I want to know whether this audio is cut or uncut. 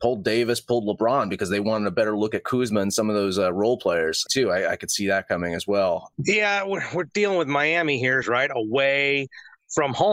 cut